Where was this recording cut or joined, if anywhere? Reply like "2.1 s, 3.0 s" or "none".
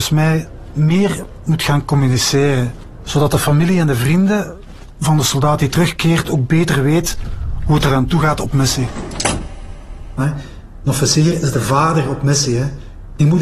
10.2 s